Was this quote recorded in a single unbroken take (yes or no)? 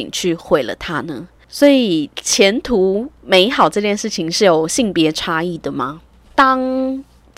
yes